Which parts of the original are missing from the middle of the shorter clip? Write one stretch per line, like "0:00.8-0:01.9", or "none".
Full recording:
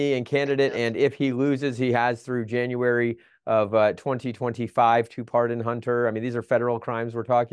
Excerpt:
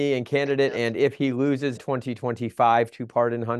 0:01.8-0:03.9